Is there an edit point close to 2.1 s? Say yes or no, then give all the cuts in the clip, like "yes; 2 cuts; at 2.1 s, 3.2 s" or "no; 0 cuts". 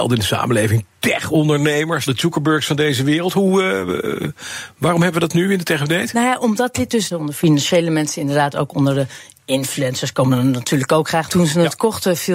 yes; 3 cuts; at 2.1 s, 7.1 s, 11.3 s